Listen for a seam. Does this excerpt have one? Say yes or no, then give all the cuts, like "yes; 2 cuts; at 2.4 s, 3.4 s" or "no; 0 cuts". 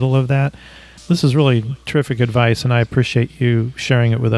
no; 0 cuts